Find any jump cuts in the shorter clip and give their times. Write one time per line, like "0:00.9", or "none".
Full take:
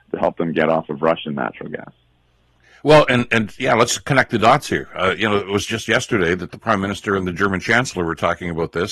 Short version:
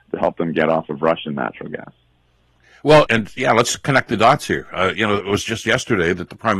0:03.1